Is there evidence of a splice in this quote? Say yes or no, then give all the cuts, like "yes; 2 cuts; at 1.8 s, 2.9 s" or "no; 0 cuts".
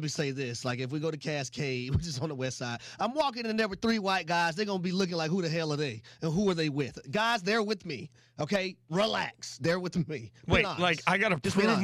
no; 0 cuts